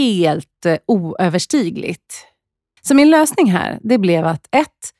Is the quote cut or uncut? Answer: cut